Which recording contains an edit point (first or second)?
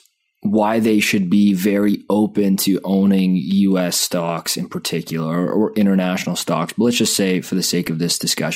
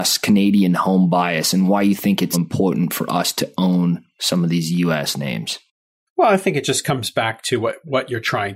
second